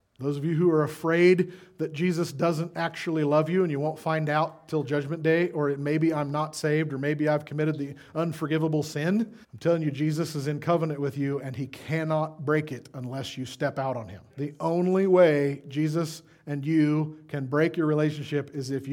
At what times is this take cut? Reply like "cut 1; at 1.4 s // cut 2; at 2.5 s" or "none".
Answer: cut 1; at 9.4 s // cut 2; at 14.3 s